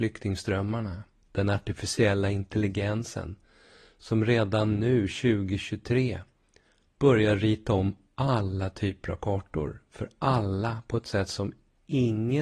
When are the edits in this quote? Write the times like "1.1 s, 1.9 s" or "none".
1.2 s